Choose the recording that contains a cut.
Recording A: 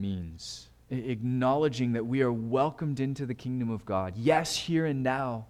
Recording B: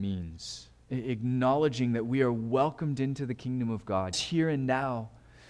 B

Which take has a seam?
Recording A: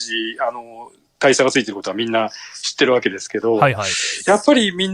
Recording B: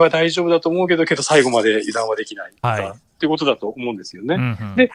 B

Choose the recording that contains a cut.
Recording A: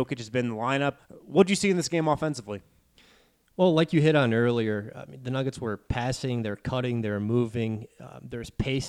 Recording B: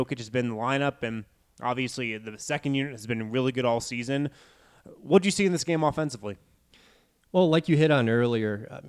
A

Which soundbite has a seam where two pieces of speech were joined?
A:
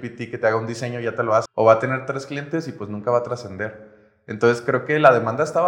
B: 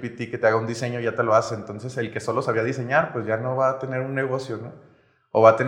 A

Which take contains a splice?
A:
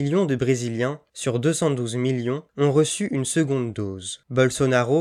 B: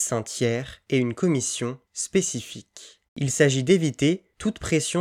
B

